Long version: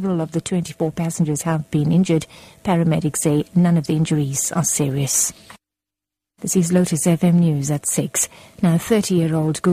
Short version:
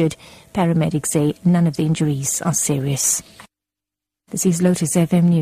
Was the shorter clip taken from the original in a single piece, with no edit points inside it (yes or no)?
yes